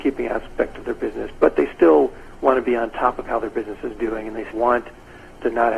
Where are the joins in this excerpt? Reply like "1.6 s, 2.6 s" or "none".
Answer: 4.5 s

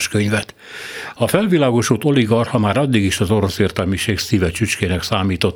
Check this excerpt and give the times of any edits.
1.1 s

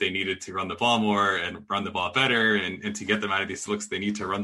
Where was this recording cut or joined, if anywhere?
2.6 s

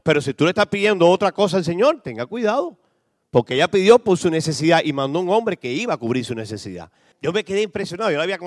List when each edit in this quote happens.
7.1 s

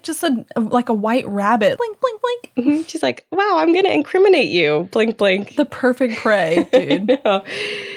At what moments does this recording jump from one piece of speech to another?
1.8 s

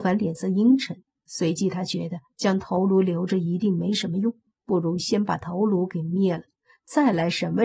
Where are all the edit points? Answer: none

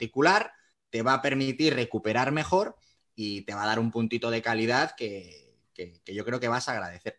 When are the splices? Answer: none

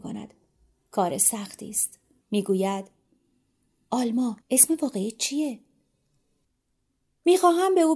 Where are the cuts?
2.2 s, 4.4 s

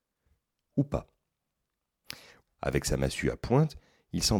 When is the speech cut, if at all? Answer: 2.5 s

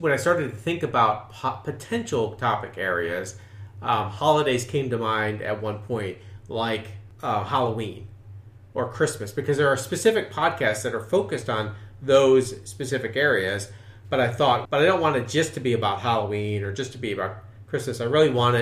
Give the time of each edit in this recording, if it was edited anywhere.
14.7 s

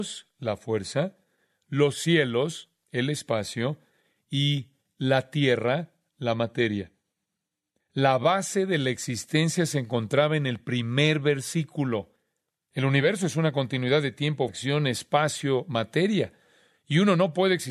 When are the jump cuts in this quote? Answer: 14.5 s

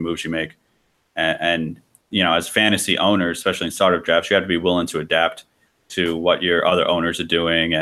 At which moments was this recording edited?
none

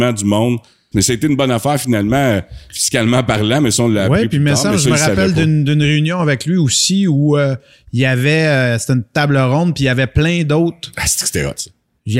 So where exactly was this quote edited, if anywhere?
0.9 s

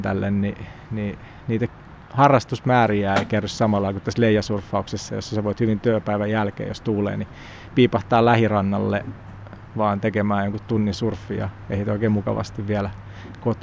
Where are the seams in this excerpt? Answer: none

